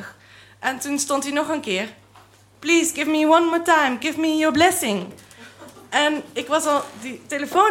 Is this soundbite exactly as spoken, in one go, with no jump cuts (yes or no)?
no